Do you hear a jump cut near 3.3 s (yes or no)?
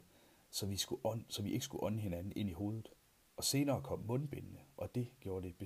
no